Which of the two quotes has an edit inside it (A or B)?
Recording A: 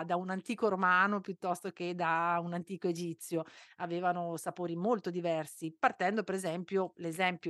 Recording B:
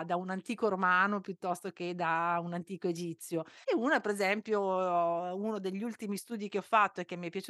B